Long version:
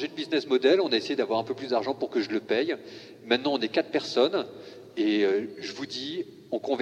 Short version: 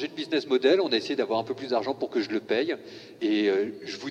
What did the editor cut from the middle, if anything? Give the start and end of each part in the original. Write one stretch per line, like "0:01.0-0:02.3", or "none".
0:03.2-0:04.9